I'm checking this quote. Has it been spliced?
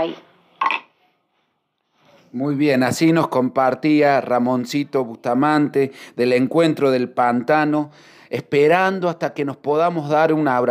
no; 0 cuts

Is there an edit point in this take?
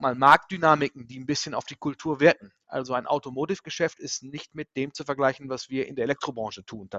no; 0 cuts

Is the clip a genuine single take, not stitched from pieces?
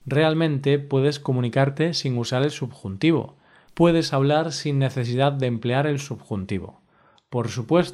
yes; 0 cuts

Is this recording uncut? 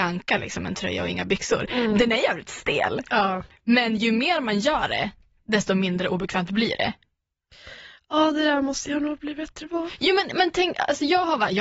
yes; 0 cuts

